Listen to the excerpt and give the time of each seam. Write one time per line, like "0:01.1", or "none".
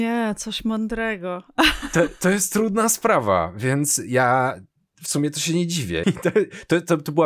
0:06.0